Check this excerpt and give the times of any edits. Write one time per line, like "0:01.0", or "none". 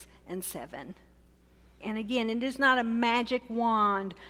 0:01.8